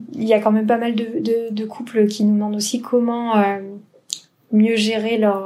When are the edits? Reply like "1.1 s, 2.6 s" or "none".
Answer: none

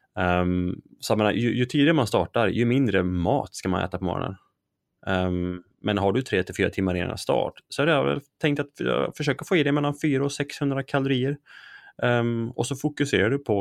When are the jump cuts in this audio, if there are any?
none

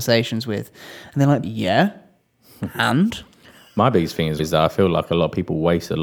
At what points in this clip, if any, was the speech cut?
1.4 s, 4.4 s

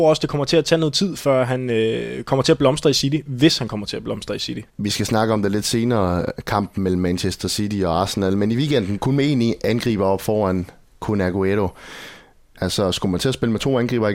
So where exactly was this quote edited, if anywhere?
4.7 s, 9.0 s, 12.5 s

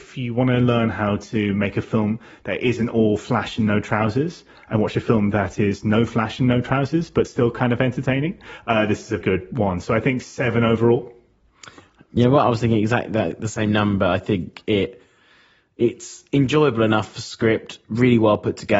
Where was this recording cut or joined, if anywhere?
9.2 s

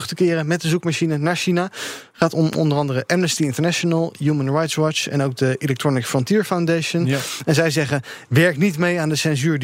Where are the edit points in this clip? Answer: none

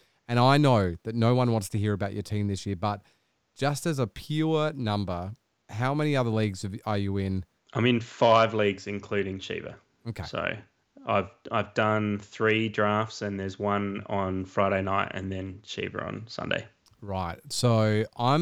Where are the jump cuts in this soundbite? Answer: 7.6 s

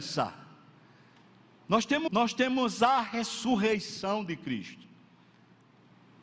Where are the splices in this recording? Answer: 2.1 s

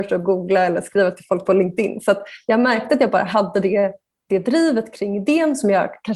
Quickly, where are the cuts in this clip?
none

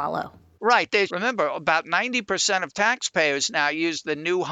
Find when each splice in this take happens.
1.1 s

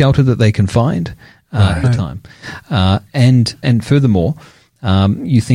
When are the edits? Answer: 1.8 s, 3.6 s

